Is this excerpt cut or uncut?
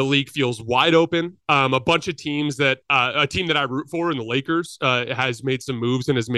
cut